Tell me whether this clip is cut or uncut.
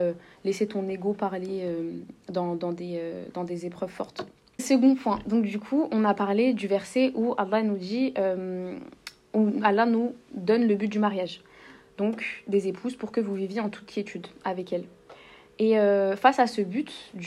uncut